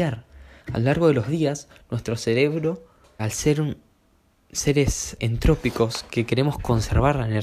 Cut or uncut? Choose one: cut